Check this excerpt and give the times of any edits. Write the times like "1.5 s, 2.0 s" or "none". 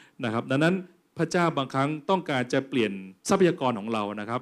3.2 s